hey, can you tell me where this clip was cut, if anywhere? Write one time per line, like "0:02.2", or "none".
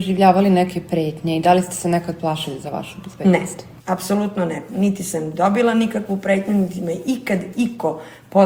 none